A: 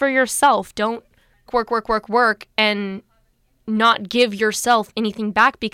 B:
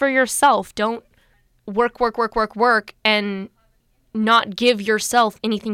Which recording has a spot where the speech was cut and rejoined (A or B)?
A